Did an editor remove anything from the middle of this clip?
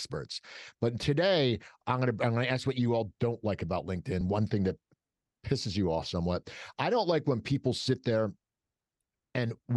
no; 0 cuts

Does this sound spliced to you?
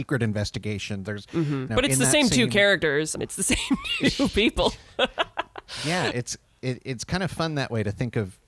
yes; 2 cuts; at 1.7 s, 3.2 s

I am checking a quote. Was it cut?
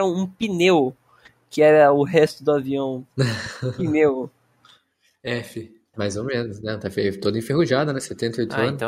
yes; 1 cut; at 5.9 s

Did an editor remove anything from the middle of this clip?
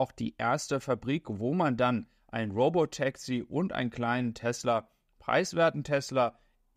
no; 0 cuts

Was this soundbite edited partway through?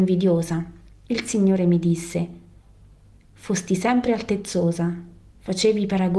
no; 0 cuts

